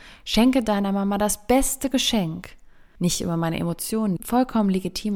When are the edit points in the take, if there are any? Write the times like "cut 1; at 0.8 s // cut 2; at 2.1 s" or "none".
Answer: cut 1; at 3.0 s // cut 2; at 4.2 s